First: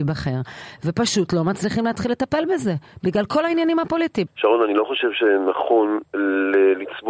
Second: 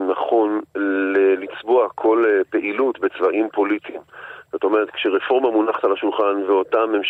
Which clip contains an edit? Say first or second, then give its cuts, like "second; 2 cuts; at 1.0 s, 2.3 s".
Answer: first; 1 cut; at 4.3 s